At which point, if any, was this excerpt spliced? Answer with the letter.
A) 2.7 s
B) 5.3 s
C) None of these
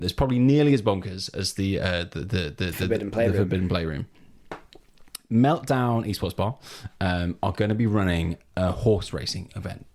C